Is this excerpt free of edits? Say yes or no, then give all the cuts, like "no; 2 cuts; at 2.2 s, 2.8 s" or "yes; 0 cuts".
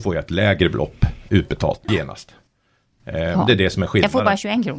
yes; 0 cuts